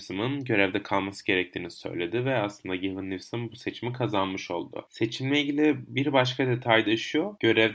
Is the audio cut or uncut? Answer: uncut